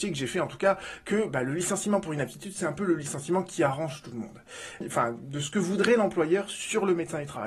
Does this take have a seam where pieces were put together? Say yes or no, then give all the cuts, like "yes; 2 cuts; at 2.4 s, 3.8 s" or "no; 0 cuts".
yes; 1 cut; at 4.8 s